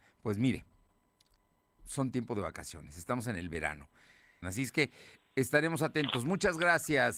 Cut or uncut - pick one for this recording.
cut